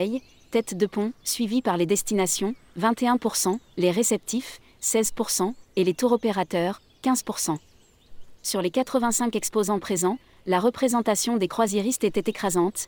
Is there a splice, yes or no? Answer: yes